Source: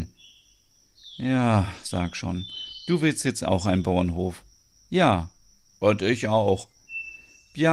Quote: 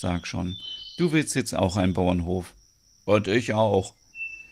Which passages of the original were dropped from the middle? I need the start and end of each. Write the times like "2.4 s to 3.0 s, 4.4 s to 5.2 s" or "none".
4.8 s to 5.7 s